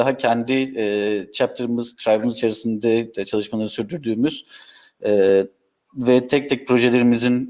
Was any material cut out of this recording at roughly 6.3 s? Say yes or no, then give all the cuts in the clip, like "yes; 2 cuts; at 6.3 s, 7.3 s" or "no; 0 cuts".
no; 0 cuts